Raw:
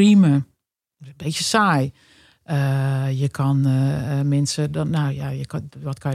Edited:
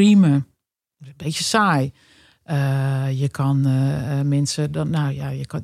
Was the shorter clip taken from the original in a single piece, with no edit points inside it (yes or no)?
yes